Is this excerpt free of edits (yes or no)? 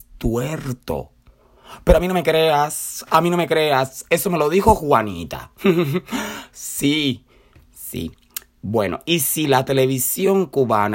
yes